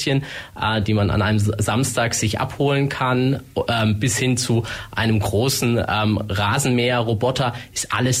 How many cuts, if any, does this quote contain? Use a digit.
0